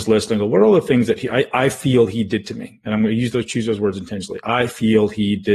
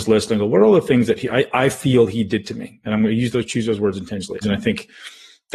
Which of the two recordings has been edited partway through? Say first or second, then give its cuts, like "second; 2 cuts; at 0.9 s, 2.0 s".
second; 1 cut; at 4.4 s